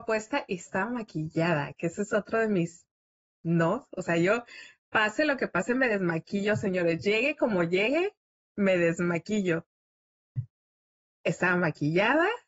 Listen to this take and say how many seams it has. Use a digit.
0